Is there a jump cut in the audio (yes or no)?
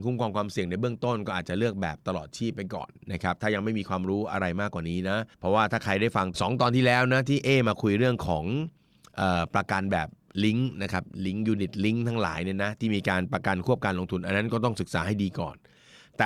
yes